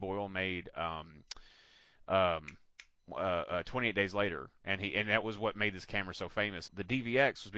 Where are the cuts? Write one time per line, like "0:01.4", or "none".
0:06.7